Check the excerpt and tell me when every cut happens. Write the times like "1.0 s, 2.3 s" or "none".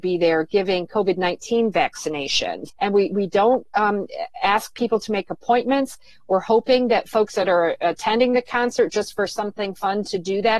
2.7 s